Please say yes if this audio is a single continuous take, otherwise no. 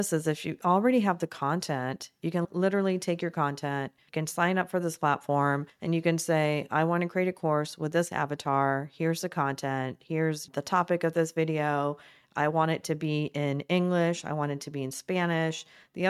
yes